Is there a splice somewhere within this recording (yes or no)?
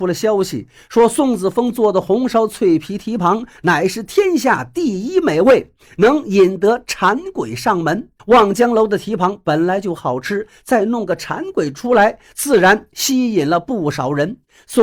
yes